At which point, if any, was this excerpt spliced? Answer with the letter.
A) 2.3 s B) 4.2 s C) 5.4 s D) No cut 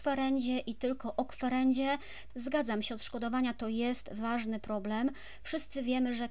A